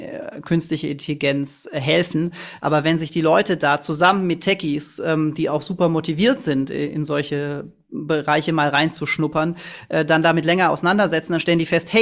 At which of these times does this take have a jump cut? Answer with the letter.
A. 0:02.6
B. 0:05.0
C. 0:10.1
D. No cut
A